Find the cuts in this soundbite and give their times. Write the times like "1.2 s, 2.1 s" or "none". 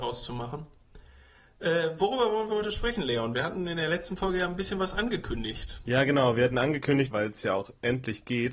7.1 s